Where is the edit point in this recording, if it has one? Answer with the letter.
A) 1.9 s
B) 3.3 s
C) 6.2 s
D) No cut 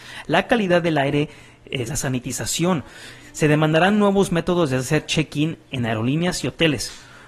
A